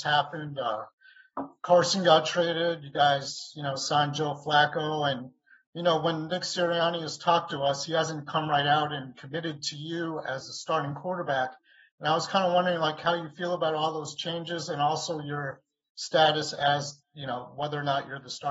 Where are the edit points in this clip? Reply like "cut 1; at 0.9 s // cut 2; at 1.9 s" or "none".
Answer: none